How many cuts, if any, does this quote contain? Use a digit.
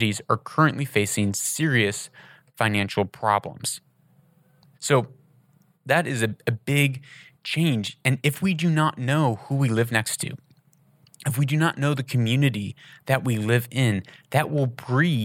1